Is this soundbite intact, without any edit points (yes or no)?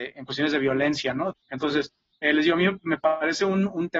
no